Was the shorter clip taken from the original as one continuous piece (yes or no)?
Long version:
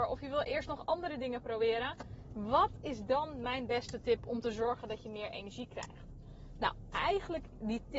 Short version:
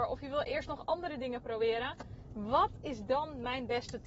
yes